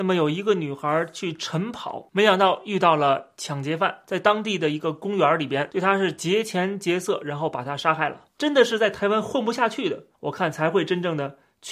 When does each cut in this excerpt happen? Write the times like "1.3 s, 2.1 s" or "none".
8.3 s, 10.1 s